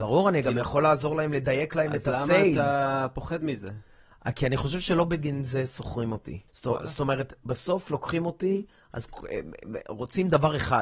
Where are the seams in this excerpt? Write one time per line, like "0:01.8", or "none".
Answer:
0:06.5